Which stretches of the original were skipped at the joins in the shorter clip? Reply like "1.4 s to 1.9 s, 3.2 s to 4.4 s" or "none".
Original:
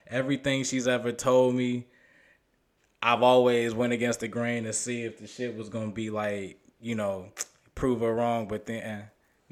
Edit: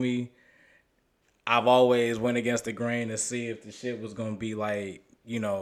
none